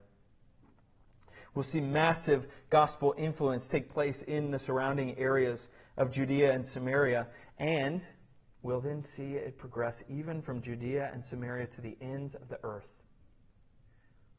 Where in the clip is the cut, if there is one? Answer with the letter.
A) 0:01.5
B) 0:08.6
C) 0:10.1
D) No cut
B